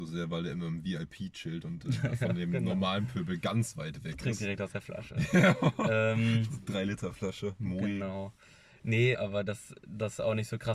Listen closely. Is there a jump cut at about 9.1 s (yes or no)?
yes